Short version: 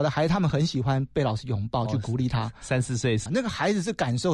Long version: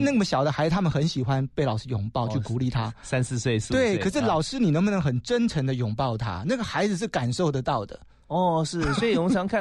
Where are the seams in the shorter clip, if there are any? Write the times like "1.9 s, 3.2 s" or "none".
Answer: 3.3 s